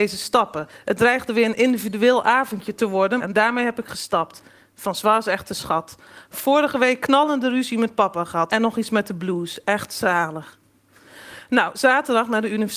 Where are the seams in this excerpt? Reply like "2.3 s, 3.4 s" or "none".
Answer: 3.2 s, 6.2 s, 8.5 s